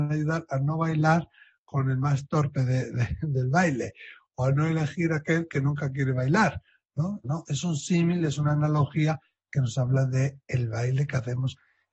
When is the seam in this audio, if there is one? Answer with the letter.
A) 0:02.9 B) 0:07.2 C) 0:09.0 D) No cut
B